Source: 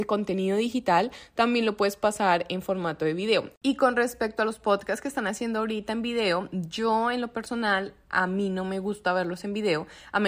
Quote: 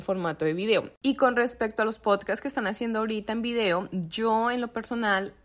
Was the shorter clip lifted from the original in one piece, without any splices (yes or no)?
yes